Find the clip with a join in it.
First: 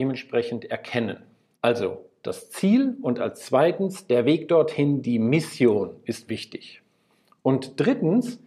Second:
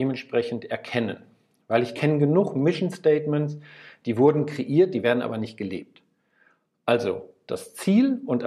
first; 1 cut; at 1.5 s

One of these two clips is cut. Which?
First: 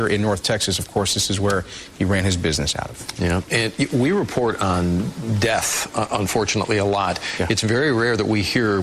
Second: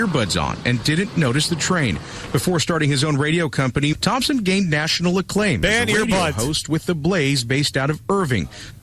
second; 1 cut; at 3.9 s

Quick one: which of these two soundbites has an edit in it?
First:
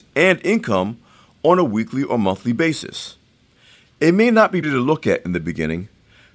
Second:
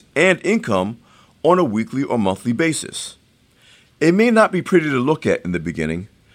first; 1 cut; at 4.6 s

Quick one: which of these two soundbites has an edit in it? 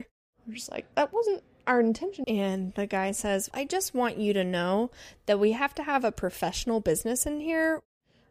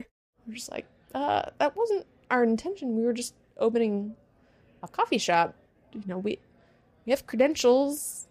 first; 3 cuts; at 0.9 s, 2.2 s, 3.5 s

